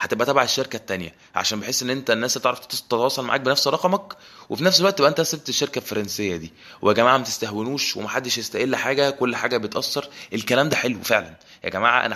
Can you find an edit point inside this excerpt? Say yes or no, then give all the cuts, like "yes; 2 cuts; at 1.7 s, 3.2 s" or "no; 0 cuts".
no; 0 cuts